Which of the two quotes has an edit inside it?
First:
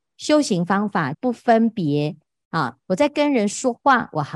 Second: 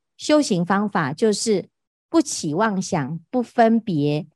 first; 2 cuts; at 1.1 s, 2.8 s

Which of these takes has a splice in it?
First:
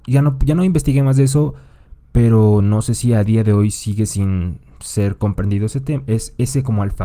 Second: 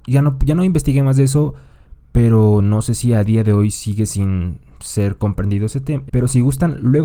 second; 1 cut; at 6.1 s

